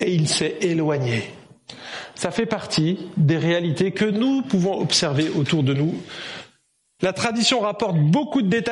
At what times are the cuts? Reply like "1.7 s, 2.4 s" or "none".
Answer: 7.0 s